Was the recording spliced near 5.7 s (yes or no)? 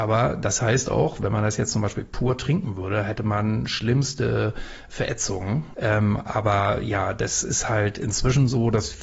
yes